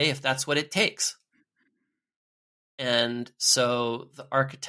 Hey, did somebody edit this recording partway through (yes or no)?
no